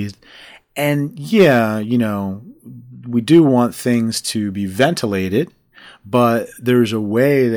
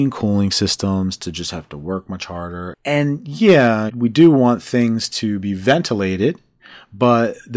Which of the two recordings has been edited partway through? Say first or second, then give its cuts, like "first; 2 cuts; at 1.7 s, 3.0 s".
second; 2 cuts; at 2.7 s, 3.9 s